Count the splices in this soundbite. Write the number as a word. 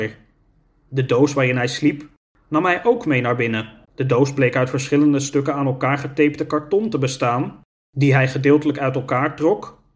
one